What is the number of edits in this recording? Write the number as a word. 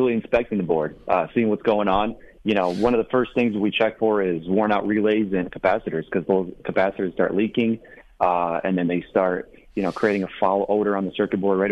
zero